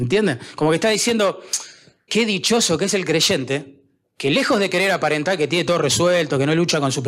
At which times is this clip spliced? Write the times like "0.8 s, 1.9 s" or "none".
2.1 s